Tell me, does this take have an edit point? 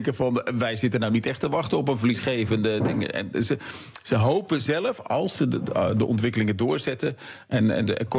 no; 0 cuts

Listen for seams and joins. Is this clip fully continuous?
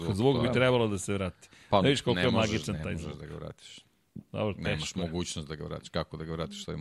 yes; 0 cuts

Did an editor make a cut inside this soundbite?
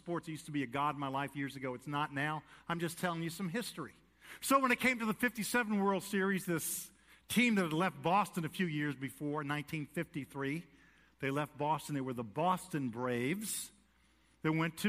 no; 0 cuts

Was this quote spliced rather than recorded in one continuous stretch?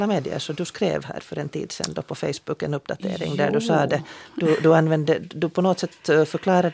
no; 0 cuts

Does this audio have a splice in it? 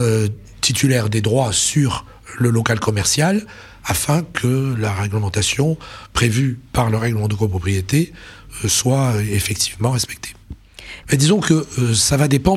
yes; 1 cut; at 11.0 s

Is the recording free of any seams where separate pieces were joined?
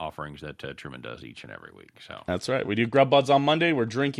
yes; 0 cuts

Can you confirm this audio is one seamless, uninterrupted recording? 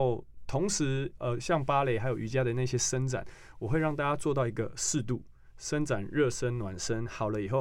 yes; 0 cuts

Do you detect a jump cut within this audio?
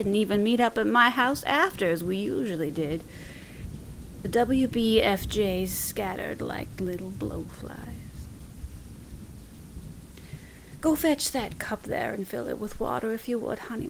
no; 0 cuts

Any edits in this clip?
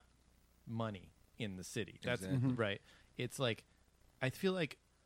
no; 0 cuts

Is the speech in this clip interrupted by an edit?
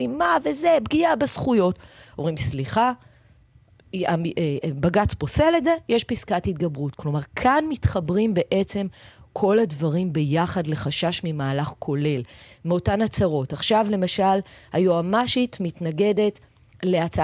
no; 0 cuts

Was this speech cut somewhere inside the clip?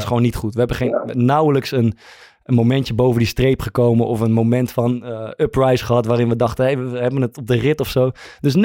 no; 0 cuts

